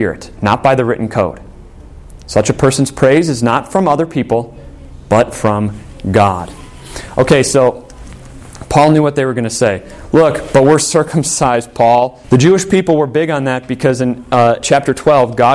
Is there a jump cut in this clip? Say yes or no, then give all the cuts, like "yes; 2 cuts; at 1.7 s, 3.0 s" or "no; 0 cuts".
yes; 2 cuts; at 12.2 s, 14.6 s